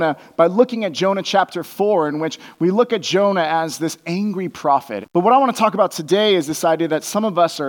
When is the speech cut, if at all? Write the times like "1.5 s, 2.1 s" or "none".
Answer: 5.0 s